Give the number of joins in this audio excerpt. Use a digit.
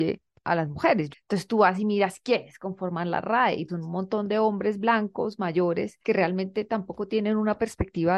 3